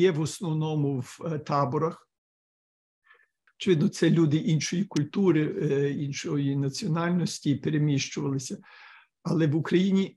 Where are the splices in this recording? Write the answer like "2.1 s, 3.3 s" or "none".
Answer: 3.5 s